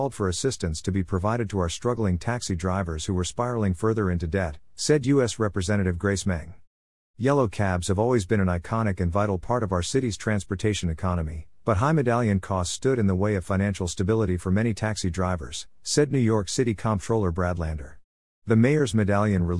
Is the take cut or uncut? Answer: cut